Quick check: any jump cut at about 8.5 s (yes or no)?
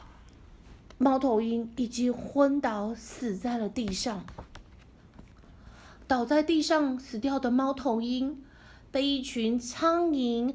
no